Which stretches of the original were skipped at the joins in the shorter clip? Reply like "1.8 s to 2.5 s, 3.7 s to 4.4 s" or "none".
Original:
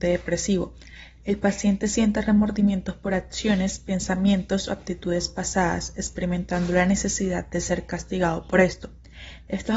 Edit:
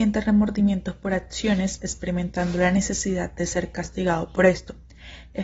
3.8 s to 5.9 s

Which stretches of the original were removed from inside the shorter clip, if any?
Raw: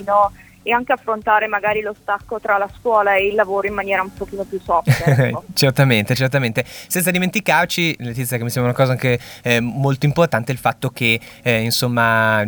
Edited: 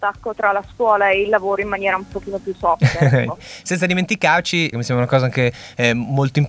5.4 s to 6.6 s, 8.0 s to 8.4 s

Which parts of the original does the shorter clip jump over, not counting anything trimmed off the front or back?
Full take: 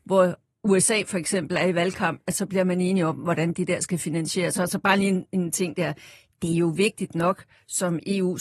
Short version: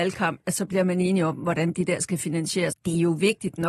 4.5 s to 6.3 s

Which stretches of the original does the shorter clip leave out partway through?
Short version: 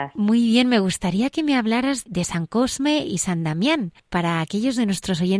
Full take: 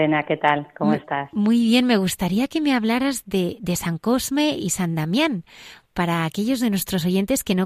3.2 s to 3.6 s, 5.5 s to 5.8 s

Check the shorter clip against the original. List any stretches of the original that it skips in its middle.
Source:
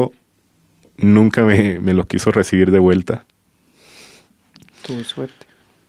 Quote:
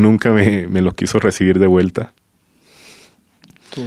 none

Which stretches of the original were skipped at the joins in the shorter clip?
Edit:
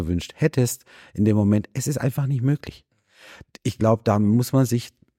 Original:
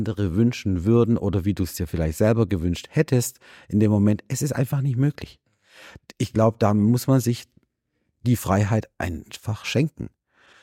none

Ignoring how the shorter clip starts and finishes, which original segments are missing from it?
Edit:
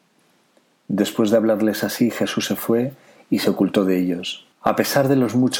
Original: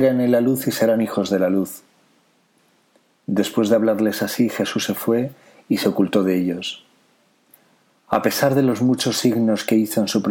6.9 s to 8.0 s

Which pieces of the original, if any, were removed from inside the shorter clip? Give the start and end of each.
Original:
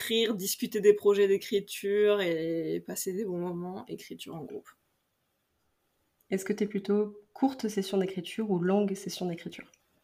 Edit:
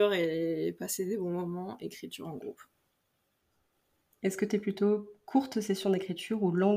none

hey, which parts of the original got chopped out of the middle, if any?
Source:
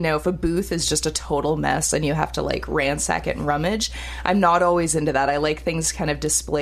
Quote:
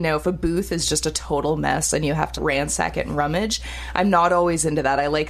2.4 s to 2.7 s

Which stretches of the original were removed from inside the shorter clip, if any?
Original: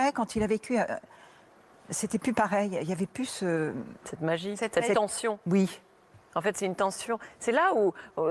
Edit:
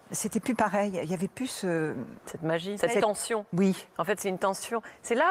4.6 s to 4.7 s, 5.8 s to 6.3 s

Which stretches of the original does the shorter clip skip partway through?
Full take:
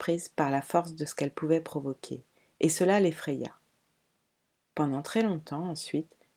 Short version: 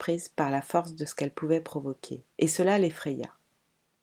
2.3 s to 2.5 s

